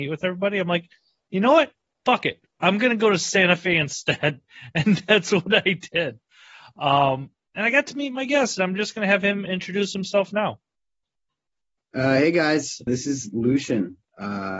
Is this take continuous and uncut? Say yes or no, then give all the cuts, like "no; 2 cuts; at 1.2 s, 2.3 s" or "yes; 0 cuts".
no; 1 cut; at 12.9 s